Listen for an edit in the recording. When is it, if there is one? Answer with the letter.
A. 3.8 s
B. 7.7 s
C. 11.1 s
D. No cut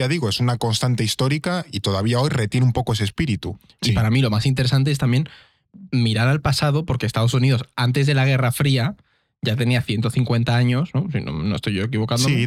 A